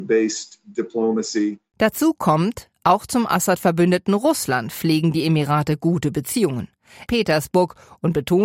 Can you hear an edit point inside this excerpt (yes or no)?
yes